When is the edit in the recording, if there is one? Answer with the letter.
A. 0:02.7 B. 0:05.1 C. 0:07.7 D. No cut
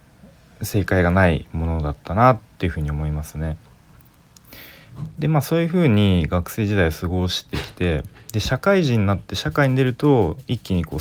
D